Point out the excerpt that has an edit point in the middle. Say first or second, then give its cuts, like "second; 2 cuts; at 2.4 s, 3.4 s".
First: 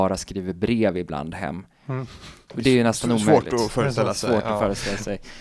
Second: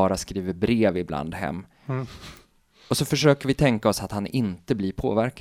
first; 1 cut; at 2.5 s